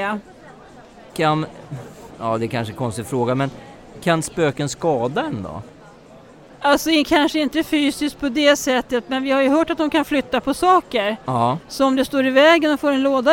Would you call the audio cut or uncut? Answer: uncut